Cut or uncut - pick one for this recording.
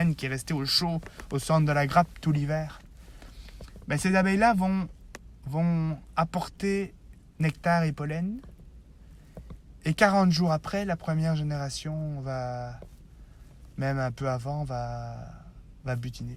uncut